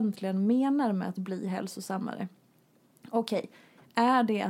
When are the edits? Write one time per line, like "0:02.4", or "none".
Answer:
none